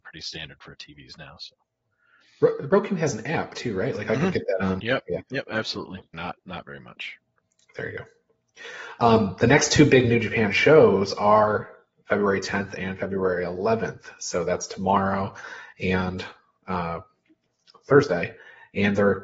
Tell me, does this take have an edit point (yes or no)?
yes